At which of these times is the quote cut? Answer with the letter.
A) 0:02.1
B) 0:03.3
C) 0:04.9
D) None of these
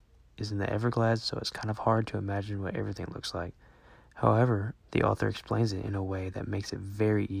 C